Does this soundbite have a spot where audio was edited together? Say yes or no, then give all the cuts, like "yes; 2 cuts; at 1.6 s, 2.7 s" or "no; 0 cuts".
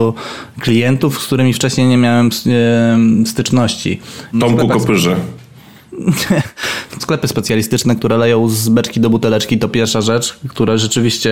yes; 2 cuts; at 4.3 s, 7.0 s